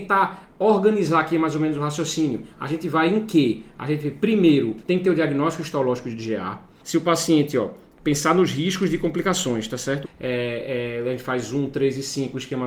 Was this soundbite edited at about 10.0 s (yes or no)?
yes